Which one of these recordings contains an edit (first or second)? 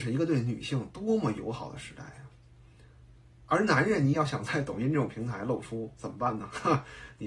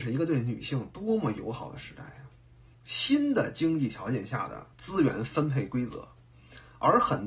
second